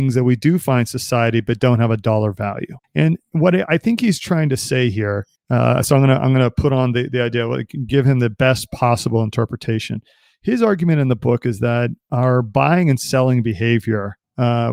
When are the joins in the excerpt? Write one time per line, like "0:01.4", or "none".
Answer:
0:02.8